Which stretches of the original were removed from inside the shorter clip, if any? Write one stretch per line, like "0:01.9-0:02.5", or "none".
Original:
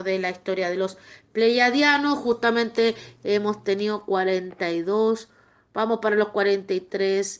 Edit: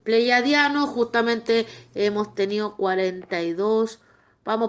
none